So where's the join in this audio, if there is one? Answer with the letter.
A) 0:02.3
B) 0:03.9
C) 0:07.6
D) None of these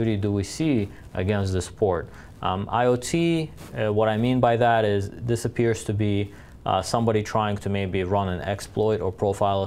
A